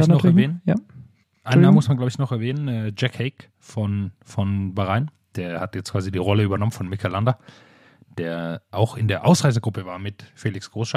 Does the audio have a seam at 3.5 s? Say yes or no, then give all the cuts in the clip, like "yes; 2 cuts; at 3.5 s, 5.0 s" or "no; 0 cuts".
no; 0 cuts